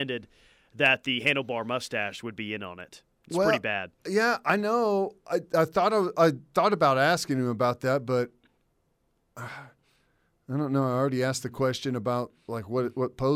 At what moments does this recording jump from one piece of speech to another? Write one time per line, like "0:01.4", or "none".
none